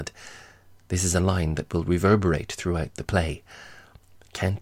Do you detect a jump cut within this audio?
no; 0 cuts

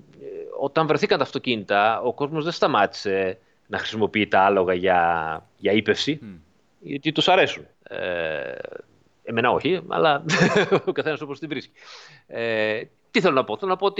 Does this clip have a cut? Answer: yes; 1 cut; at 7.7 s

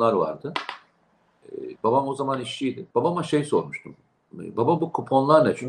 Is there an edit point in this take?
yes; 2 cuts; at 1.8 s, 2.9 s

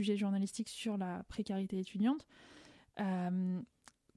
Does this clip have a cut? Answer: no; 0 cuts

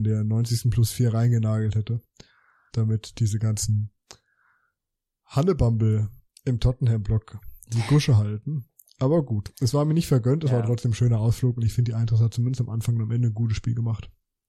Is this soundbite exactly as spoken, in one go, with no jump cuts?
no; 1 cut; at 2.7 s

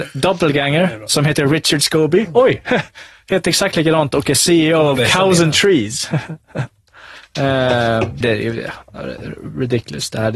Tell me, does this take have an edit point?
yes; 1 cut; at 8.2 s

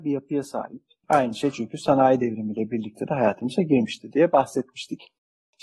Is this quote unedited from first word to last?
no; 1 cut; at 1.0 s

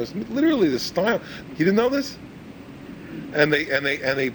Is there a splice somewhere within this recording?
yes; 1 cut; at 1.5 s

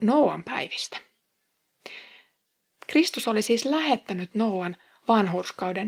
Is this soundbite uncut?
no; 1 cut; at 2.7 s

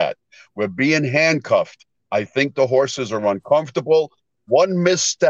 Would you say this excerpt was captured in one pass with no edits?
yes; 0 cuts

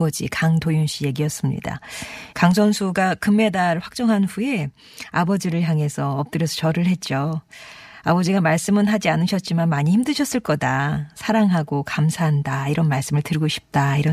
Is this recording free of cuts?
no; 1 cut; at 2.3 s

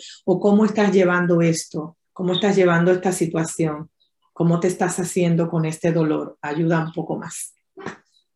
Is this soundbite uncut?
no; 1 cut; at 2.0 s

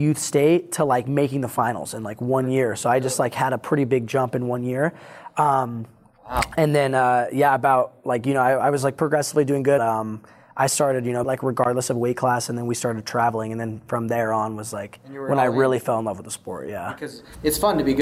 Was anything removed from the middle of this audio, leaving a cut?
yes; 2 cuts; at 9.8 s, 11.2 s

